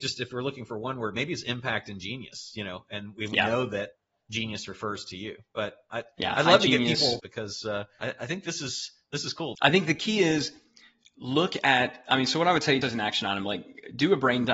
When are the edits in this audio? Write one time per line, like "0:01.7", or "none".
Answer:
0:07.2
0:09.6
0:12.8